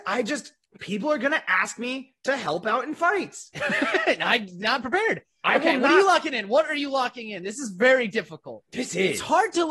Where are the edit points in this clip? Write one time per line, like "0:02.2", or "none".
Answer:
none